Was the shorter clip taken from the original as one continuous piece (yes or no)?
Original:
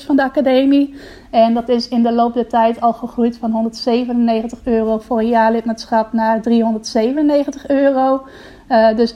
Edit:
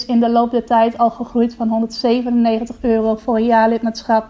yes